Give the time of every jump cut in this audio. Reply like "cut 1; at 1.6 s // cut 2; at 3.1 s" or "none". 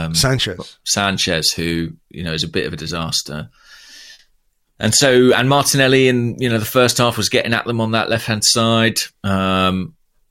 cut 1; at 9.2 s